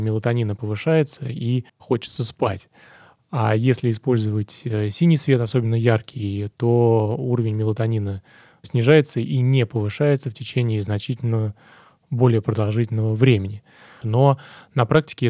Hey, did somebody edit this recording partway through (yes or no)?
yes